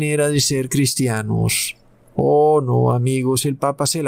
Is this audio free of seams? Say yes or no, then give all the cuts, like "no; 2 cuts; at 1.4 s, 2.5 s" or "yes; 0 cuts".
yes; 0 cuts